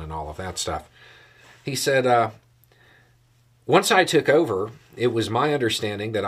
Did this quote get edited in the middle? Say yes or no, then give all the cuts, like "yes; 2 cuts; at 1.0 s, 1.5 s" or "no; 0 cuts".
no; 0 cuts